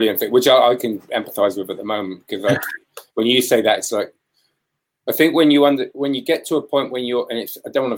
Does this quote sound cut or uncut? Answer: uncut